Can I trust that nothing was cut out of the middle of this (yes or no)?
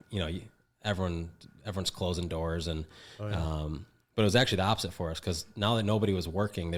yes